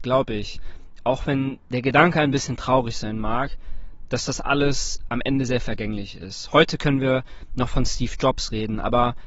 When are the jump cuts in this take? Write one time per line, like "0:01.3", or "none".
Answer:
0:05.5